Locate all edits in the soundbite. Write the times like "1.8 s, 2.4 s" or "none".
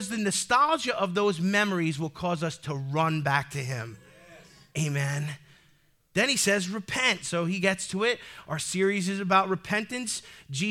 none